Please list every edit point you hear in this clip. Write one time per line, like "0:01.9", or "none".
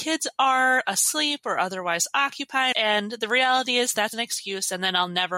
0:02.7
0:04.1